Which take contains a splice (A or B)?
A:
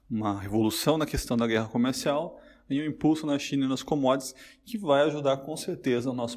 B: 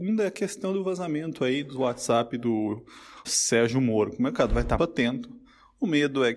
B